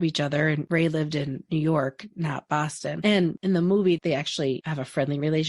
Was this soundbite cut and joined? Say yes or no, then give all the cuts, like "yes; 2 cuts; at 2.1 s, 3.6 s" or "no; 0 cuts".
yes; 1 cut; at 4.0 s